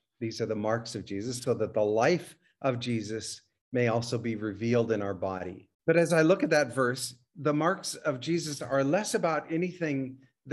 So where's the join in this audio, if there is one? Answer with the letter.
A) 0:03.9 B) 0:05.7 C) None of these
B